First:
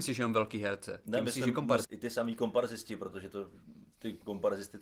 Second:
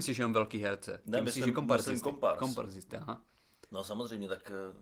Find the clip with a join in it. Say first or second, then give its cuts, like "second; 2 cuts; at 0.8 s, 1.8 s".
first; 1 cut; at 1.8 s